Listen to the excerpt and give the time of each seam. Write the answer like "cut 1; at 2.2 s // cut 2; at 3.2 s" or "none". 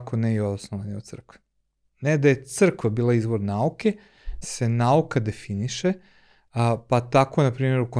cut 1; at 1.9 s // cut 2; at 4.4 s